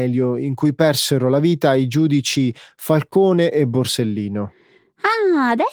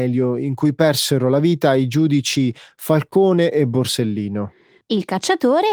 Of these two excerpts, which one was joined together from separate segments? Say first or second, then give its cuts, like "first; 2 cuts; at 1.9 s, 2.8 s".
second; 1 cut; at 4.8 s